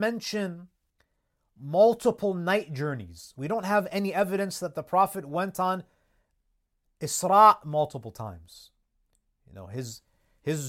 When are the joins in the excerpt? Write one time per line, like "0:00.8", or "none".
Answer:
none